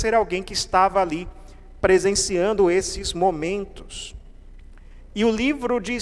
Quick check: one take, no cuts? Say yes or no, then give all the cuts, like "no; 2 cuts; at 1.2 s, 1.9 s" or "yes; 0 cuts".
yes; 0 cuts